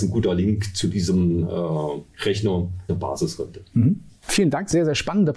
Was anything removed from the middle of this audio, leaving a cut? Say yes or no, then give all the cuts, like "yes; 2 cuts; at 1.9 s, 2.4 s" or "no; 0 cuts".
yes; 1 cut; at 2.9 s